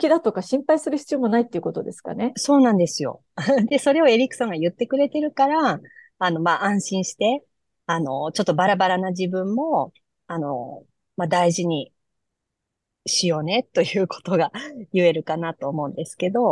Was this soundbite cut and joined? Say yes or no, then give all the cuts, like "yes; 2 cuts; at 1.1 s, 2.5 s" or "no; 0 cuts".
no; 0 cuts